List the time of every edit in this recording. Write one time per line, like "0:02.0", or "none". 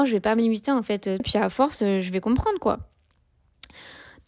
0:01.2